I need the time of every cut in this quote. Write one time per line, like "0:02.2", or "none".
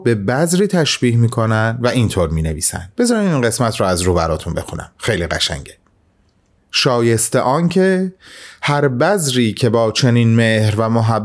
0:02.9